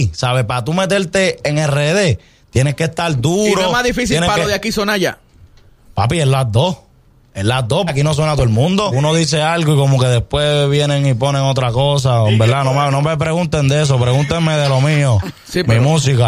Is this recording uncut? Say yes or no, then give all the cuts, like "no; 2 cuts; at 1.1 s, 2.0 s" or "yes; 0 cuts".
no; 2 cuts; at 7.9 s, 8.9 s